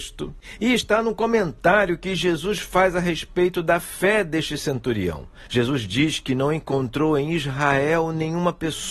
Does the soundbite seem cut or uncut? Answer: uncut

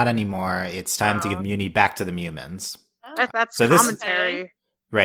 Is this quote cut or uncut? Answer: cut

